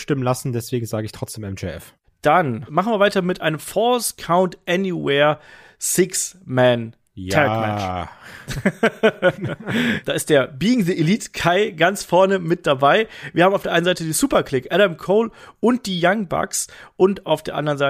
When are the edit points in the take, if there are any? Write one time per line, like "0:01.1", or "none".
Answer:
none